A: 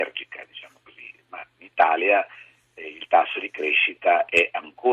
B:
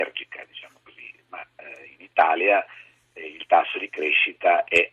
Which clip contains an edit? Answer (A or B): A